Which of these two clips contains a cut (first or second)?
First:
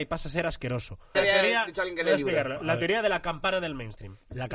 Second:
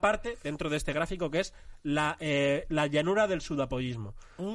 first